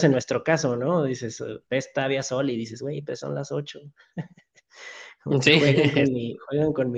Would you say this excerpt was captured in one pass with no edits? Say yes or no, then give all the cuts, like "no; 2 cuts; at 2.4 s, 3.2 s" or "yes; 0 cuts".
yes; 0 cuts